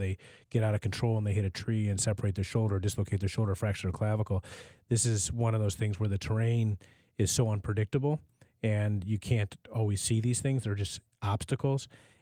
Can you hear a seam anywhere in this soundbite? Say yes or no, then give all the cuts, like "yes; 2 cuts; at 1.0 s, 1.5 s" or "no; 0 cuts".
no; 0 cuts